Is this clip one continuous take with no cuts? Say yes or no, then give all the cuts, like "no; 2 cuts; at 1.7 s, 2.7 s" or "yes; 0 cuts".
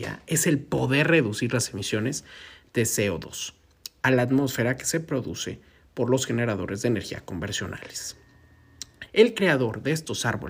no; 1 cut; at 9.1 s